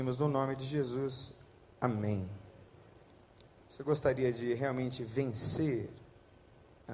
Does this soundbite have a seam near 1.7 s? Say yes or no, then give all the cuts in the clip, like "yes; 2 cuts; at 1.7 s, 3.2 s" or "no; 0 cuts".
no; 0 cuts